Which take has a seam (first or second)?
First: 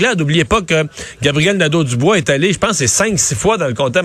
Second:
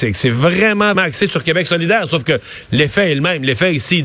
second